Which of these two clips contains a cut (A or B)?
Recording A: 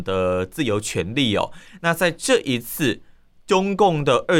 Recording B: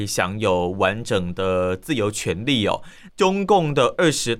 B